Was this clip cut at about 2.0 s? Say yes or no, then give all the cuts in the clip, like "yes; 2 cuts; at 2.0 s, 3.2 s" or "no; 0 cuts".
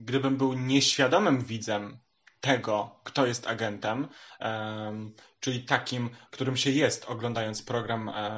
no; 0 cuts